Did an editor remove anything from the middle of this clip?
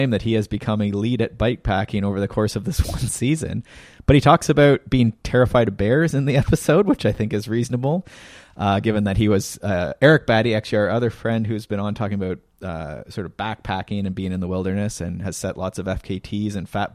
no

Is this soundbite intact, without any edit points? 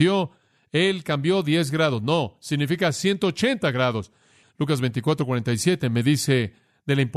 no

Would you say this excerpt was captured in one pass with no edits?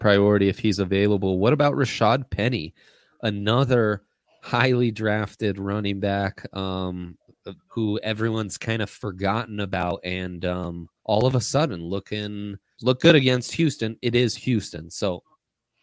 no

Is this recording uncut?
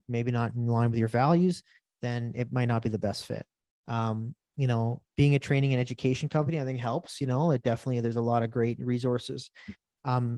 yes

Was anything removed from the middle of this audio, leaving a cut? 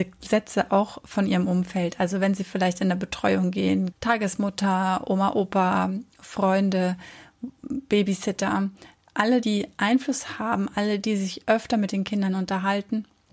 yes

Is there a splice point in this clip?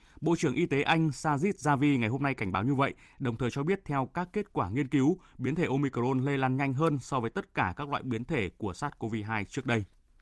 no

